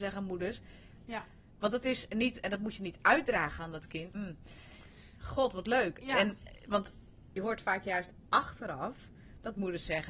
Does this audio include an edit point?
yes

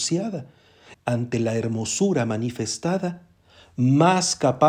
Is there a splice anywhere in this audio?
yes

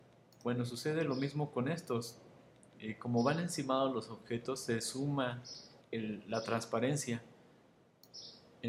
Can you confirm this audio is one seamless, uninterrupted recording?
no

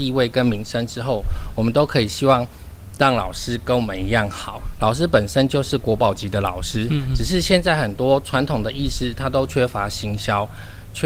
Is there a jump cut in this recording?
no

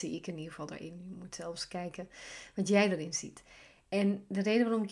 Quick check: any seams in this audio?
no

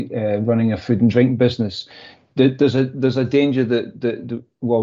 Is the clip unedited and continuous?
yes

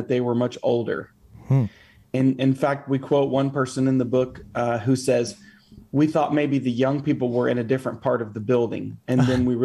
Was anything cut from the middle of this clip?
no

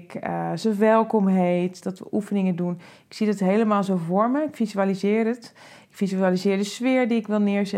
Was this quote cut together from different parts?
yes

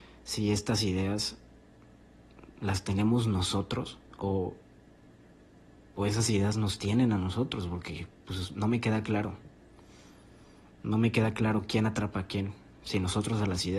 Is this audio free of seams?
yes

